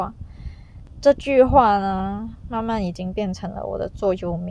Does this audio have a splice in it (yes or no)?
no